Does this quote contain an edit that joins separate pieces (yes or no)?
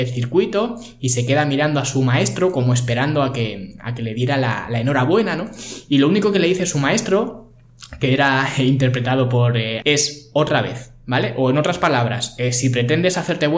yes